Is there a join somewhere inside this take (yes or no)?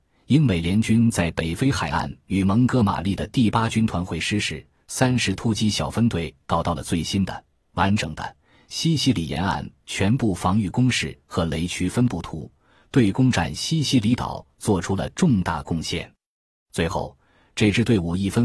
no